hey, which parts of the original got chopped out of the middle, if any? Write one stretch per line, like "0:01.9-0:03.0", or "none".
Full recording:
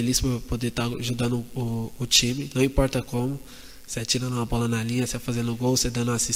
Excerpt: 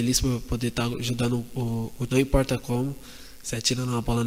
0:02.1-0:02.5